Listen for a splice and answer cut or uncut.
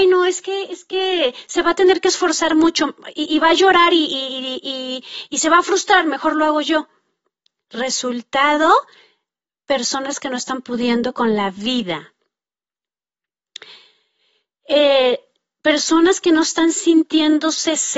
uncut